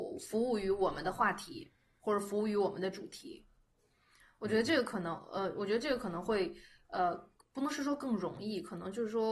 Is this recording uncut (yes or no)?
yes